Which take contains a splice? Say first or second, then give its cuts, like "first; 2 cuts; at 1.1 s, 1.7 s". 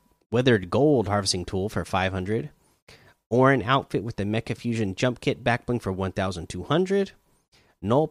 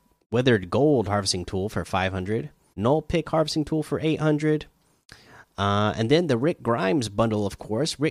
second; 1 cut; at 2.7 s